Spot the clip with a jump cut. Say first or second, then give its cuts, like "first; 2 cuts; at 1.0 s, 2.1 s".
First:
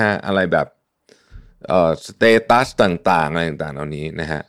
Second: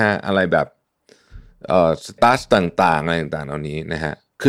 second; 1 cut; at 2.2 s